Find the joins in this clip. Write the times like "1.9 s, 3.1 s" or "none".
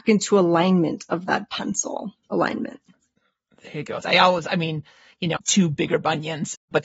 4.0 s, 5.4 s

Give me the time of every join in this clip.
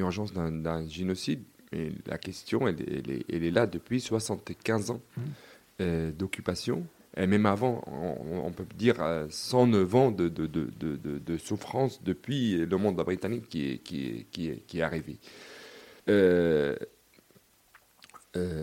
16.0 s

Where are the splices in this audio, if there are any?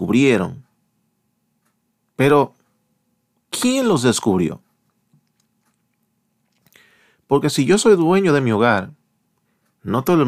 none

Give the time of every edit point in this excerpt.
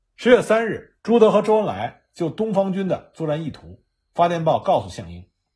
1.0 s

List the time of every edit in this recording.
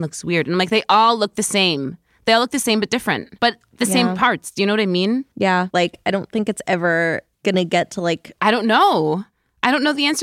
3.4 s, 5.7 s, 8.4 s

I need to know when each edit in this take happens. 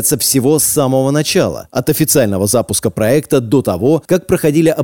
none

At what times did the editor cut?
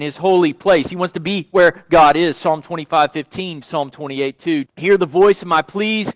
3.6 s, 4.6 s

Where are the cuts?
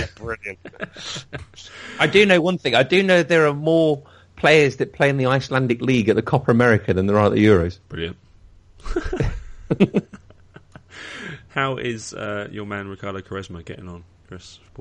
none

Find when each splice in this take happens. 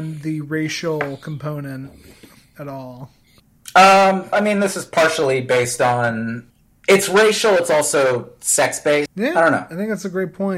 4.3 s, 9.1 s

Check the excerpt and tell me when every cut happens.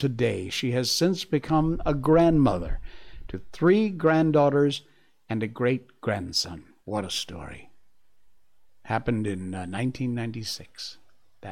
6.8 s

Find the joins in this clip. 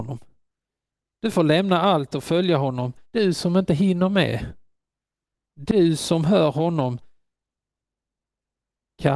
3.0 s, 5.3 s

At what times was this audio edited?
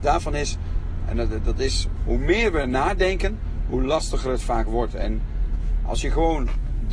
2.0 s

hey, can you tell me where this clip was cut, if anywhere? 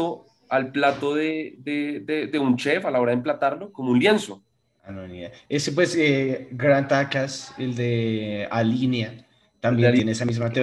none

